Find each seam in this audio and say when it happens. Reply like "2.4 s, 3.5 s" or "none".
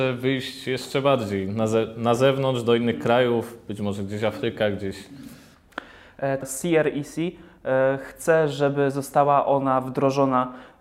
6.4 s